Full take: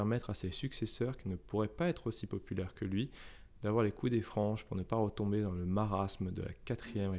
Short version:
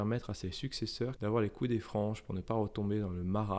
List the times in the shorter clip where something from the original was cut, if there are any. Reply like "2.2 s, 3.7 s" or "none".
1.2 s

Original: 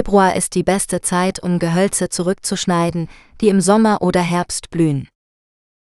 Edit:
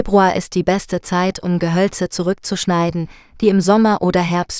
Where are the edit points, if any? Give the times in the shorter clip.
none

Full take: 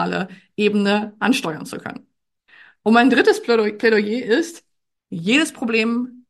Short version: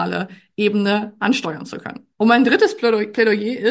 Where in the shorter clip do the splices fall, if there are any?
2.1 s

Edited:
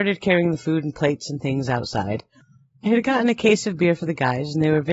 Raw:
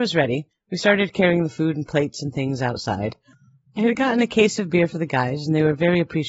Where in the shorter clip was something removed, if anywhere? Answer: none

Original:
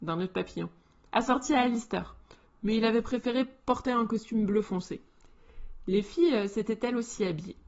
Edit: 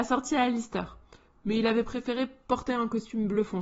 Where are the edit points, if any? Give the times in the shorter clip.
none

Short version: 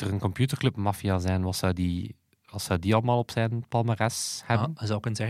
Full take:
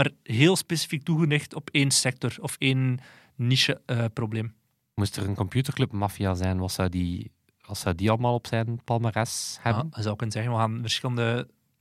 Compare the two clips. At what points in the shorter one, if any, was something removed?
none

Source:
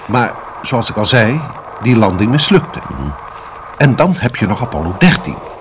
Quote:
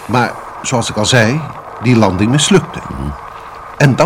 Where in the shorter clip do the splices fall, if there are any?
none

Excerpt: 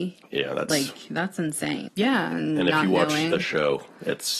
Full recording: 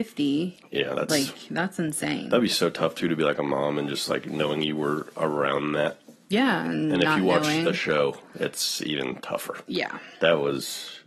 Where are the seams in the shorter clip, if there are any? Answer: 1.9 s

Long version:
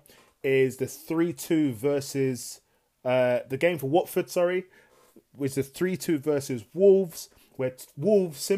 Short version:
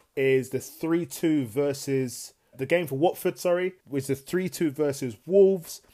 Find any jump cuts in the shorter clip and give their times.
2.5 s, 3.8 s

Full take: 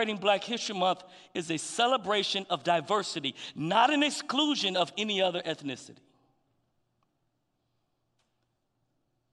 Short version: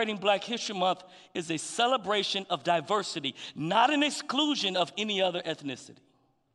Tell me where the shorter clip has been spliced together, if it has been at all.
none

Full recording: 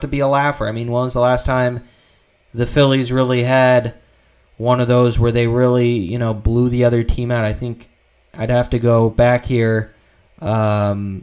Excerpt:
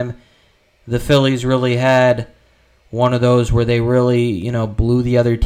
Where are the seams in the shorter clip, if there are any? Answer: none

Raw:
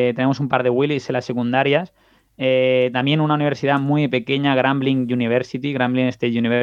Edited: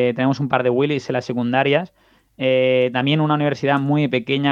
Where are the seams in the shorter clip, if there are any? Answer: none

